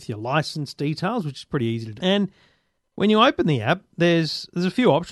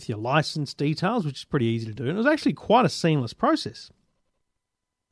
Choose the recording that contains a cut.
first; 1 cut; at 2.0 s

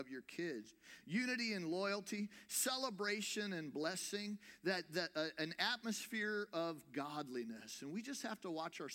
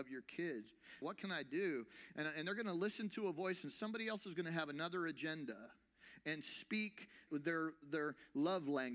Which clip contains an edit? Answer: second; 2 cuts; at 1.0 s, 7.3 s

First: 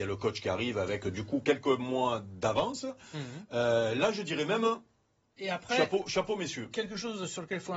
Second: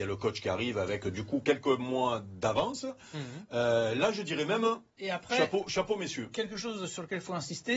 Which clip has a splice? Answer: second; 1 cut; at 4.9 s

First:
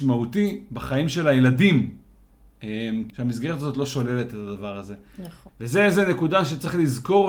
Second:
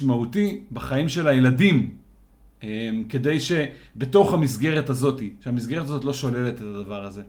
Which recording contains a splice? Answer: first; 2 cuts; at 3.1 s, 5.5 s

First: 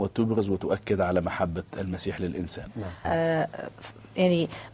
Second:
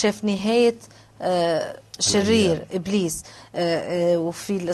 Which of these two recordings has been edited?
first; 1 cut; at 3.0 s

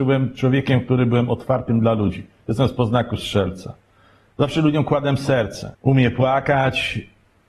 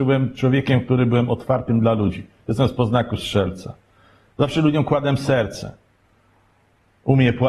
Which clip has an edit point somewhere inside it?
first; 1 cut; at 5.7 s

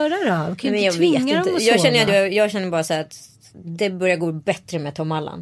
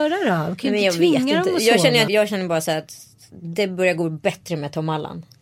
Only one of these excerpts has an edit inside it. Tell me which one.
second; 1 cut; at 2.1 s

